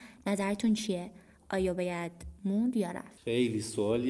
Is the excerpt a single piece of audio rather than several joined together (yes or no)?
yes